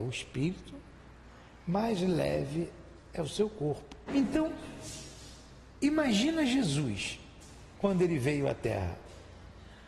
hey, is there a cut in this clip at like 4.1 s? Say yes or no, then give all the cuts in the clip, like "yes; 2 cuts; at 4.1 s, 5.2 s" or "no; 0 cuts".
yes; 1 cut; at 4.1 s